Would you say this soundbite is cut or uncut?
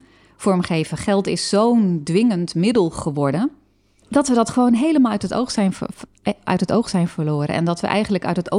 cut